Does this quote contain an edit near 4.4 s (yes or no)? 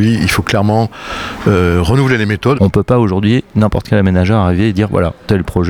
no